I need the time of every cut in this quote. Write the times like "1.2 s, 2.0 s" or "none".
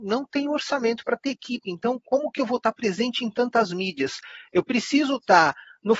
none